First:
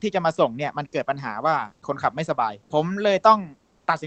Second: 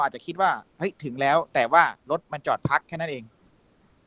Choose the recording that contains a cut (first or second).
first